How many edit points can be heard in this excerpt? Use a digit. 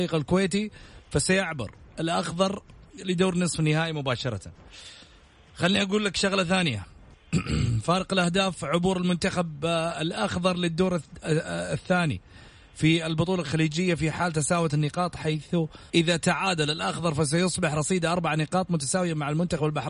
1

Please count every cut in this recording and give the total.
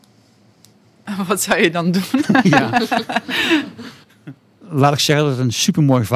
0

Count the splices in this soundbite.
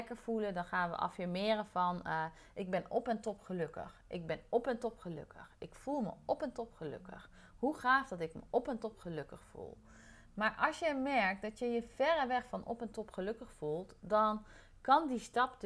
0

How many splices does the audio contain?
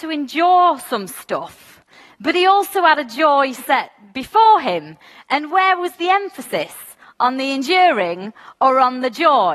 0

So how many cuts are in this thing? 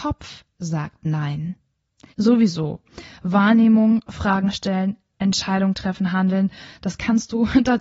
1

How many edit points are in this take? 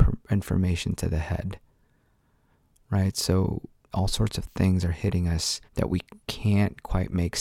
2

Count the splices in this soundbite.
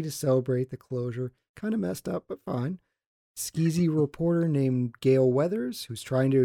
0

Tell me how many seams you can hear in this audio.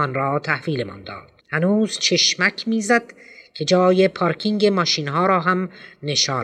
1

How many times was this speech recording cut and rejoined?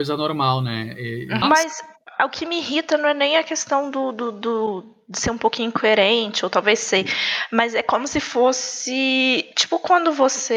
1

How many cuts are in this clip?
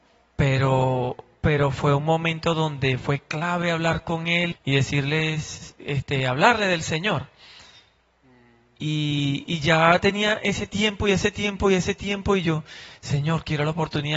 1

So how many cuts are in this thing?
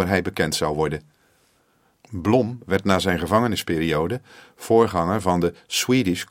0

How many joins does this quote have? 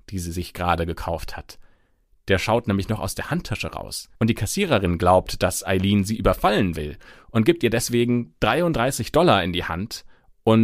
1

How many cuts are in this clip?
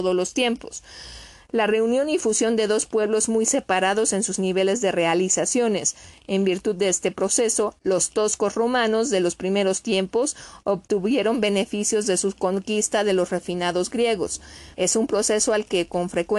1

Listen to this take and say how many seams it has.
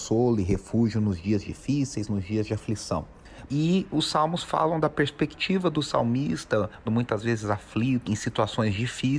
3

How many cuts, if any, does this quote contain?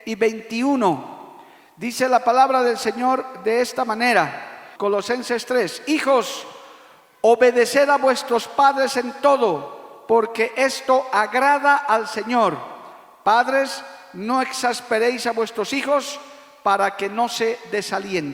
1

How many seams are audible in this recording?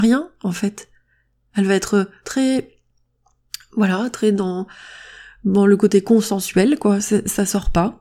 0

